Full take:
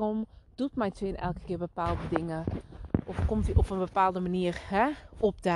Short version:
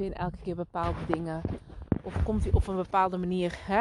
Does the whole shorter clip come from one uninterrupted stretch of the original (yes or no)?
yes